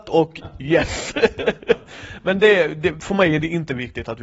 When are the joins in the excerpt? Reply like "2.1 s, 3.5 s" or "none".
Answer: none